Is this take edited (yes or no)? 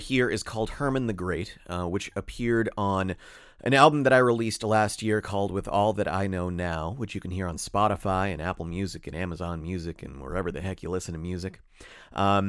no